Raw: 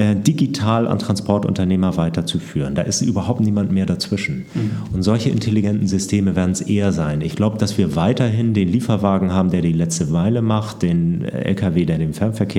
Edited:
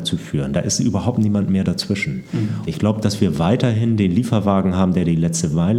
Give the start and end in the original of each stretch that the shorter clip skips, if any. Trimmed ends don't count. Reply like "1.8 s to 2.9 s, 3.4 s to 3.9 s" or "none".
4.9 s to 7.2 s